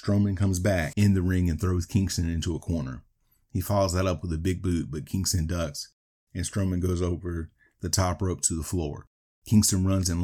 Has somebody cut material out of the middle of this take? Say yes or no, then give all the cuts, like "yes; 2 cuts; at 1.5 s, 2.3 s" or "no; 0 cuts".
no; 0 cuts